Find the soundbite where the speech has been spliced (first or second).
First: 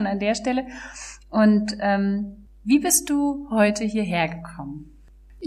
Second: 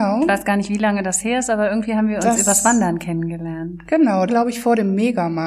second